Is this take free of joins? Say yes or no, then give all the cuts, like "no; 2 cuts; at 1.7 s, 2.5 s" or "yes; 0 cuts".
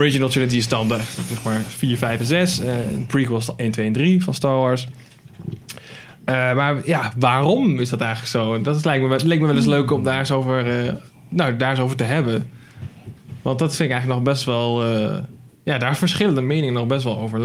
yes; 0 cuts